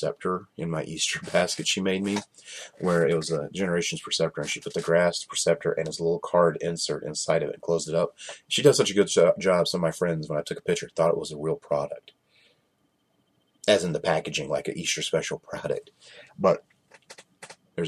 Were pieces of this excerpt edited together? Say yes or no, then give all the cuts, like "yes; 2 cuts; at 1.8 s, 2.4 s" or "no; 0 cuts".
no; 0 cuts